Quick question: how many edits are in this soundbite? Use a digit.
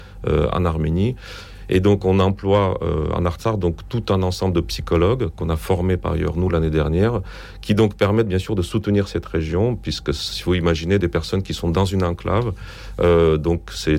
1